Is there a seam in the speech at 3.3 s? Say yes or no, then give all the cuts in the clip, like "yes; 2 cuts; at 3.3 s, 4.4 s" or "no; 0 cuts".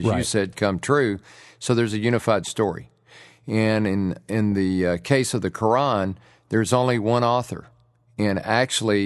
no; 0 cuts